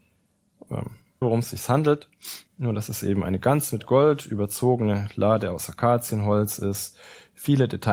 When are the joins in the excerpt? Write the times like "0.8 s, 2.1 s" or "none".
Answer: 1.2 s, 2.5 s